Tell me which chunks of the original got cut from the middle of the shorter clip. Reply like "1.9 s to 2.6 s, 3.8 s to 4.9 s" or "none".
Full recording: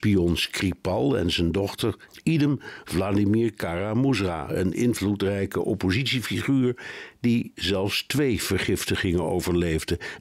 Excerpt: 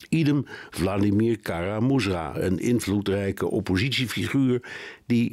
none